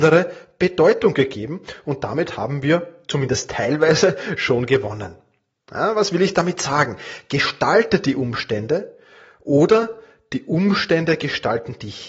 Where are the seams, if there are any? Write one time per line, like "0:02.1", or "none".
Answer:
none